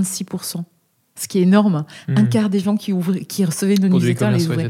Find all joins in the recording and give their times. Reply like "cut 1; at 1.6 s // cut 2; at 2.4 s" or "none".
none